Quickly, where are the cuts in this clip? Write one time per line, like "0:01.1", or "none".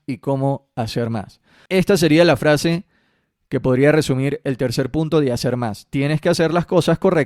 0:01.7